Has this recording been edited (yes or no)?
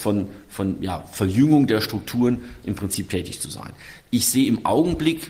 no